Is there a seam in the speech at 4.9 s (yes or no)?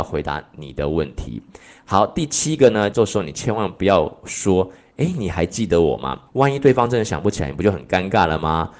no